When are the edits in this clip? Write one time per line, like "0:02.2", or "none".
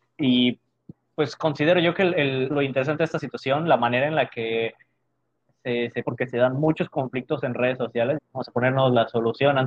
0:02.5
0:06.0
0:08.2